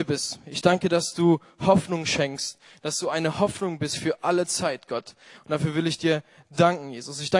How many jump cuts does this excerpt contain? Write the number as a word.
zero